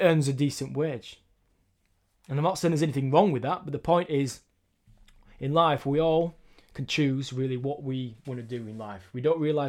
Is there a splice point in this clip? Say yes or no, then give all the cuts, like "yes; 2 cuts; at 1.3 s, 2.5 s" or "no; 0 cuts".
no; 0 cuts